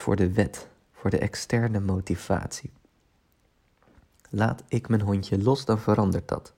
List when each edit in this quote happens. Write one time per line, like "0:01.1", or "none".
none